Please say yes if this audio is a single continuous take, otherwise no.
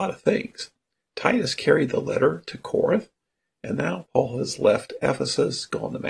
yes